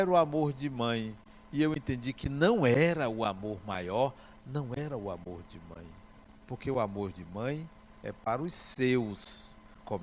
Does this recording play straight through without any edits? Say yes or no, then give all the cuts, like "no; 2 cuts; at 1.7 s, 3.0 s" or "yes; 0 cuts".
yes; 0 cuts